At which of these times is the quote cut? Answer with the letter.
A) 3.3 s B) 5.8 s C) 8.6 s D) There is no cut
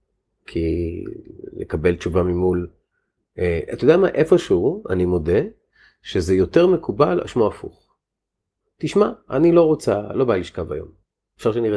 D